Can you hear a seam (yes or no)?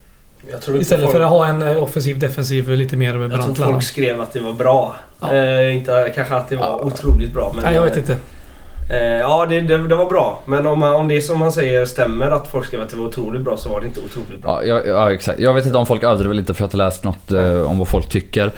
no